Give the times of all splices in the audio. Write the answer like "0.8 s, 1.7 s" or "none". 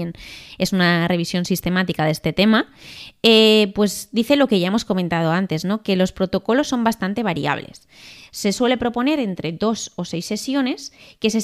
none